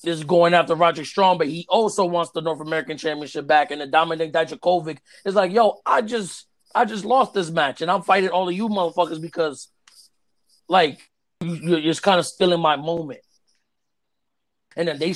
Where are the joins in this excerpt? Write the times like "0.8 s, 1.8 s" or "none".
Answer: none

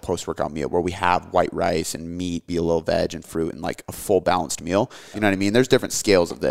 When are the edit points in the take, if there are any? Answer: 2.5 s, 5.1 s

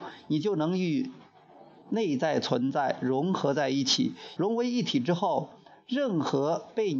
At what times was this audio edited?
4.4 s

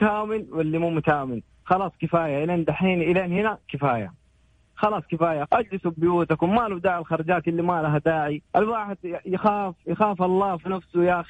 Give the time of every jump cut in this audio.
5.5 s, 8.5 s

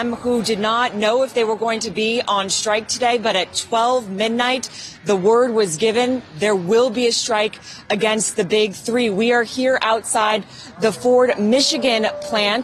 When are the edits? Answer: none

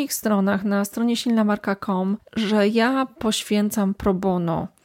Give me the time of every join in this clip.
2.2 s

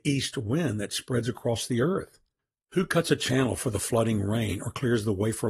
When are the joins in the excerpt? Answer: none

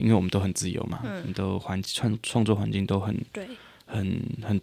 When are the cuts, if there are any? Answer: none

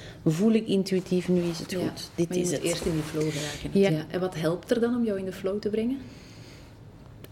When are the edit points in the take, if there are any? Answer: 3.9 s

